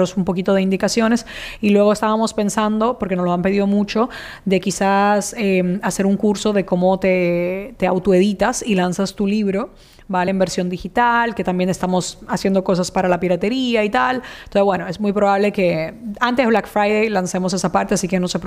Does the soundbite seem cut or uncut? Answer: uncut